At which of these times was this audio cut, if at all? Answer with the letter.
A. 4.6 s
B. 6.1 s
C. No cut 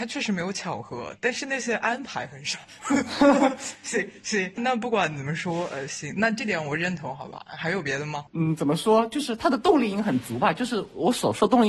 A